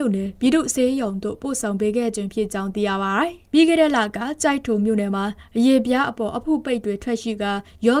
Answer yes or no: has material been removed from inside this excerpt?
no